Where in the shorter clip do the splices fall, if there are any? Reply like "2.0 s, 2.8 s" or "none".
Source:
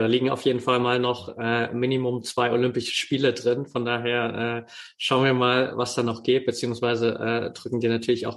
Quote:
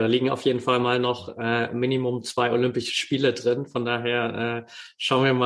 none